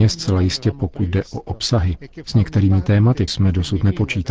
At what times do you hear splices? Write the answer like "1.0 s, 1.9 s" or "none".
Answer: 3.3 s

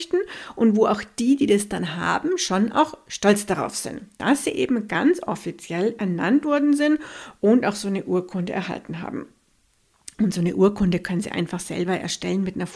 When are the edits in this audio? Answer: 10.1 s

